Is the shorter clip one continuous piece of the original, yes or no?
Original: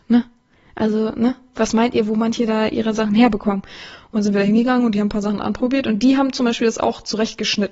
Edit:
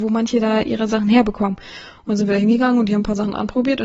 yes